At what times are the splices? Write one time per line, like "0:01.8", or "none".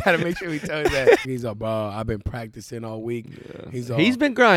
0:01.2